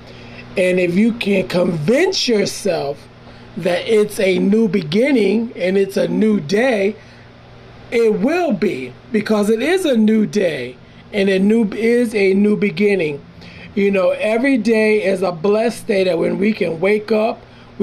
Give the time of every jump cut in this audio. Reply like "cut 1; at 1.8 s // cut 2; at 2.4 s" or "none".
none